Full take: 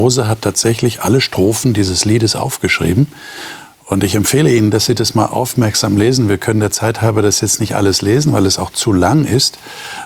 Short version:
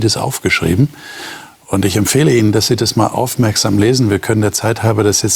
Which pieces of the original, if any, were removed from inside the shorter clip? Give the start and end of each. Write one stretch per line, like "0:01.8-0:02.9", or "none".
none